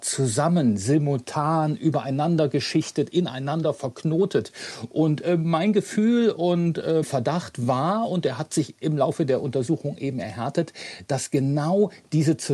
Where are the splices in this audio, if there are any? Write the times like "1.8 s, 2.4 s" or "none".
7.0 s